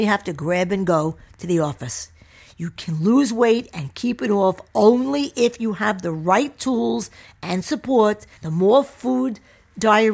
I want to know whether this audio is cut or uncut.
cut